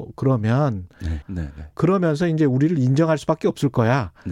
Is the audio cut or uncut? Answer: cut